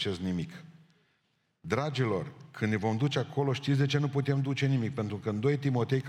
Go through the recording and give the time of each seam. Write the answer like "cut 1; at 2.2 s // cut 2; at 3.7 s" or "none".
none